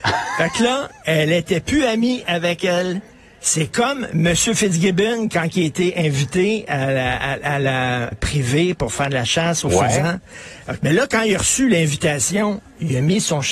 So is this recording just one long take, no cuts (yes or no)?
no